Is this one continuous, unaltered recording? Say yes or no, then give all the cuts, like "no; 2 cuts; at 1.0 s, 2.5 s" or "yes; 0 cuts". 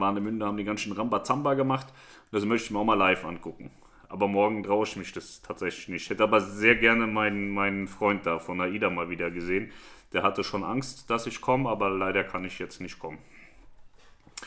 yes; 0 cuts